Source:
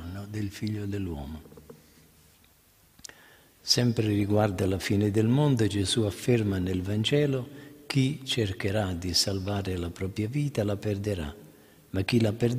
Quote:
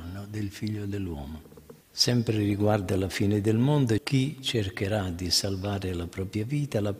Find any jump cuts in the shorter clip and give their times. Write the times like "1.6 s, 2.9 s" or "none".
1.8 s, 4.0 s